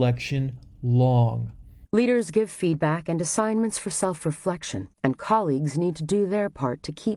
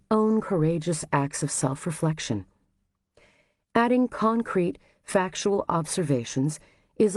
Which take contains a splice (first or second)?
first